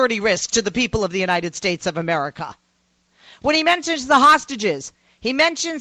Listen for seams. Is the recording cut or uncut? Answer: uncut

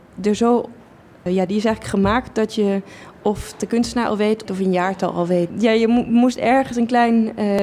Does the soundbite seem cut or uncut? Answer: cut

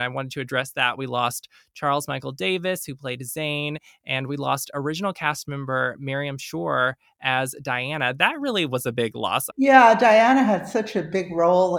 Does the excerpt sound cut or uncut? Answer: cut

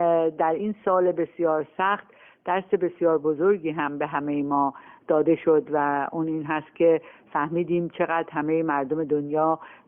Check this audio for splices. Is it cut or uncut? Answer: uncut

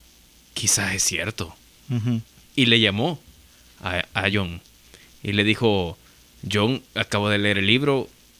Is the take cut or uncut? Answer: uncut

